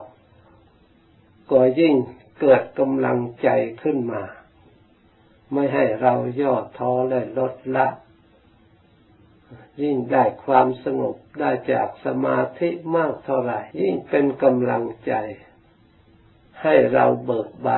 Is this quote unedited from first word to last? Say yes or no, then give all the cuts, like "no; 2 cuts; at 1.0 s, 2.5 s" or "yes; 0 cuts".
no; 1 cut; at 13.7 s